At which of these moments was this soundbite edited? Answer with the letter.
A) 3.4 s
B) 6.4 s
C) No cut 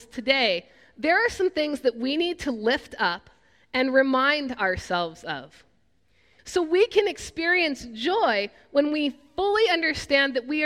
B